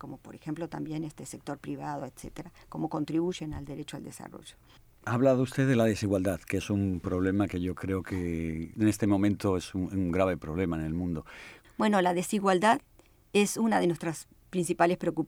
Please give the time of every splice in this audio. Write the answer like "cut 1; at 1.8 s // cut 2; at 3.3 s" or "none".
cut 1; at 11.6 s